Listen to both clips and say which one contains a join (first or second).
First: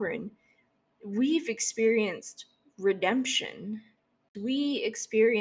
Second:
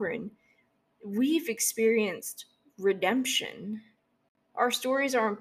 first